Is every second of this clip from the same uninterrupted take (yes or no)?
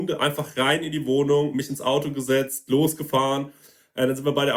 yes